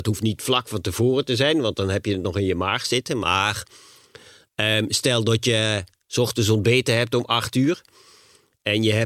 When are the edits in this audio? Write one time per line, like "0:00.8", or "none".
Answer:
none